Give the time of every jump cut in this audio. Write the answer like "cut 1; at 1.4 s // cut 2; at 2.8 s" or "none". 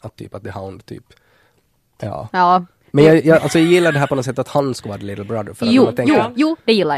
cut 1; at 2.0 s